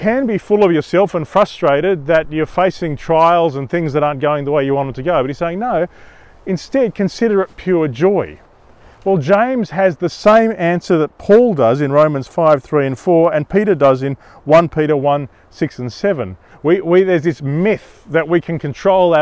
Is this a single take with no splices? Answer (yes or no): no